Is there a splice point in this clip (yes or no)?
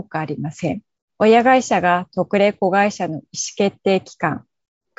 yes